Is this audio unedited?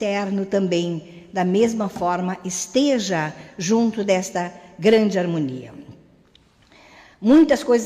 yes; 0 cuts

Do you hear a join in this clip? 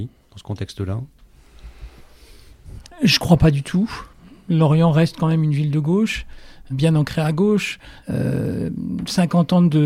yes; 2 cuts; at 6.7 s, 8.0 s

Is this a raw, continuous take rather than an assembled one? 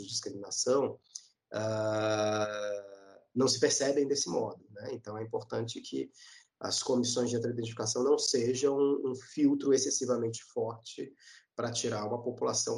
yes; 0 cuts

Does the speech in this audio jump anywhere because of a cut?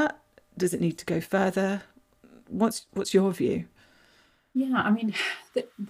no; 0 cuts

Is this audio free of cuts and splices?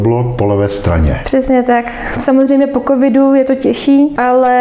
no; 1 cut; at 2.1 s

